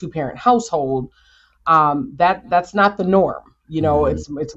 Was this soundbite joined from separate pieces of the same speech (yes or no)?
no